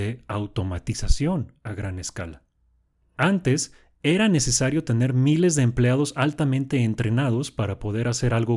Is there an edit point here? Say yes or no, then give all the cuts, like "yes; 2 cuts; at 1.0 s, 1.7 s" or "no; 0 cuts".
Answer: no; 0 cuts